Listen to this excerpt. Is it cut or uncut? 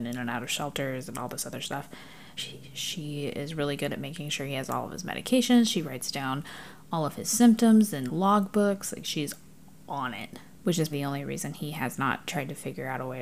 cut